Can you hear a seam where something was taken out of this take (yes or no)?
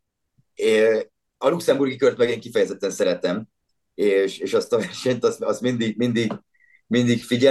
no